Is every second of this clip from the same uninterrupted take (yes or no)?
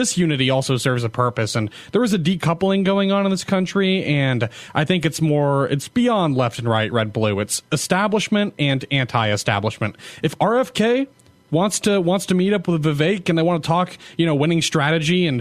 yes